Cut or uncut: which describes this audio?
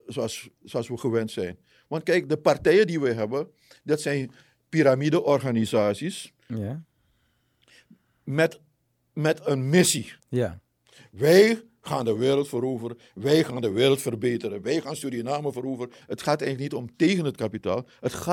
cut